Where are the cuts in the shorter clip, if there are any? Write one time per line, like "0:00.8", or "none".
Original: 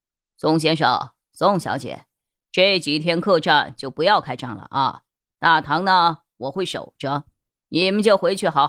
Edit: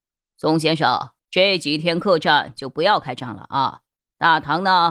0:01.2